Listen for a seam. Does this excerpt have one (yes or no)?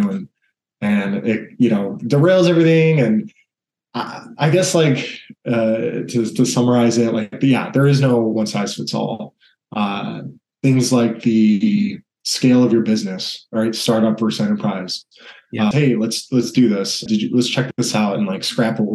yes